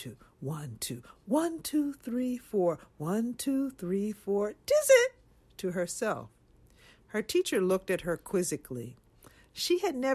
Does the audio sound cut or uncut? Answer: uncut